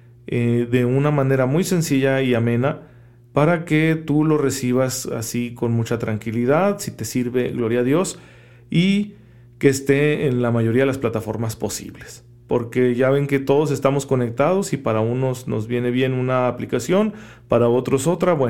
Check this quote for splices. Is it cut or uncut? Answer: uncut